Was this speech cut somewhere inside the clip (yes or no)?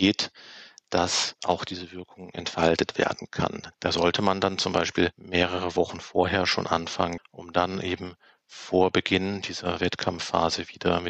yes